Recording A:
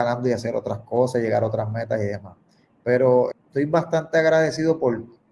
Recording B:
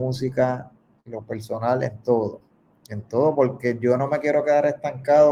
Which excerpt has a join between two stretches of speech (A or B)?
A